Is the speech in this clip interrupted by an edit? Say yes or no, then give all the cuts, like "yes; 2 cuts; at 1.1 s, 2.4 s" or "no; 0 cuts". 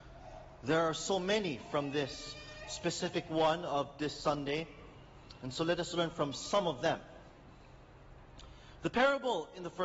no; 0 cuts